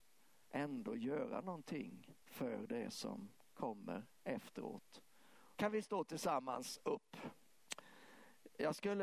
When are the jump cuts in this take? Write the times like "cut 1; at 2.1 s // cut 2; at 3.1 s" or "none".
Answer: cut 1; at 2.2 s // cut 2; at 5.5 s

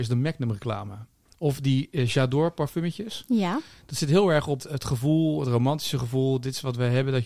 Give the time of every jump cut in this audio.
cut 1; at 4.6 s

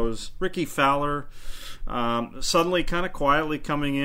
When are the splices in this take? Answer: none

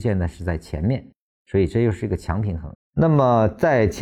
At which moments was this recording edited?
cut 1; at 2.7 s

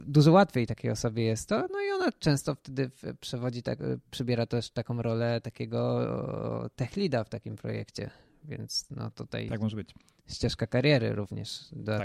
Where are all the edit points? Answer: none

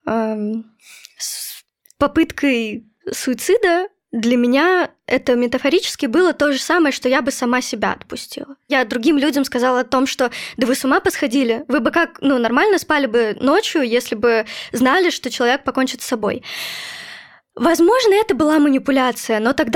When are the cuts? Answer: cut 1; at 3.0 s

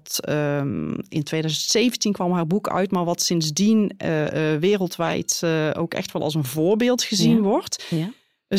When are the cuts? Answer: none

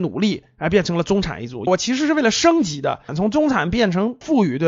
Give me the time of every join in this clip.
cut 1; at 1.7 s // cut 2; at 3.1 s

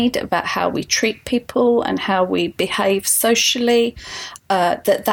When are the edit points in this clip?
none

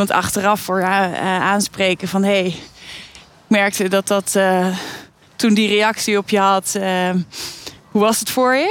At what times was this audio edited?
cut 1; at 7.8 s

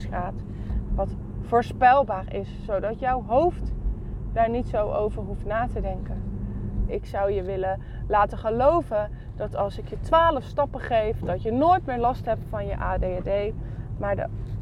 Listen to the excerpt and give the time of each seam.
cut 1; at 6.9 s

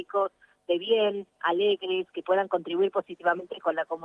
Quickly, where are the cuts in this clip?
none

